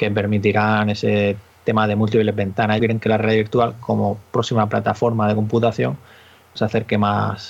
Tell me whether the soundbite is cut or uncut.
cut